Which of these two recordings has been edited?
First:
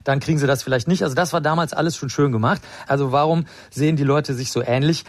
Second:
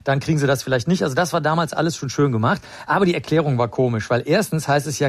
first; 1 cut; at 2.9 s

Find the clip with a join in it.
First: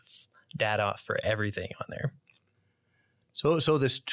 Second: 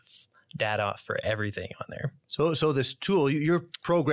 second; 1 cut; at 2.2 s

